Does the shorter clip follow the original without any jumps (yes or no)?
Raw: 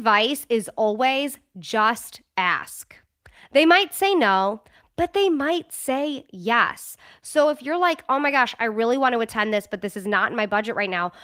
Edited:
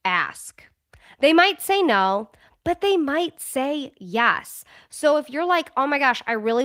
yes